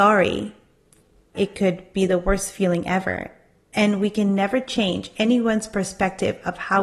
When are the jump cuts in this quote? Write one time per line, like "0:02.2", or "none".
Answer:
0:01.3